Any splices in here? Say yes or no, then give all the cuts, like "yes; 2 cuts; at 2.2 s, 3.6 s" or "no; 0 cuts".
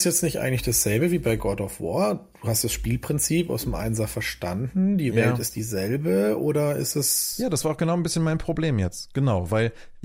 no; 0 cuts